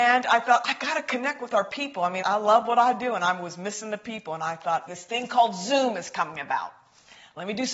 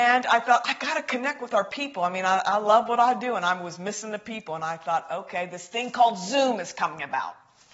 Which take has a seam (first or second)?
first